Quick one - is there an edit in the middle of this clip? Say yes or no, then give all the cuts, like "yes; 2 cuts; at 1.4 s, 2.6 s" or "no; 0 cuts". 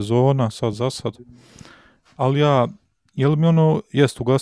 no; 0 cuts